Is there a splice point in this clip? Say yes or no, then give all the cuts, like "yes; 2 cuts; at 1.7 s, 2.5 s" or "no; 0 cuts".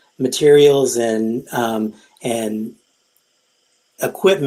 no; 0 cuts